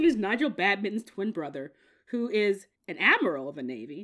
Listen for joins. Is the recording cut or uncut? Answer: cut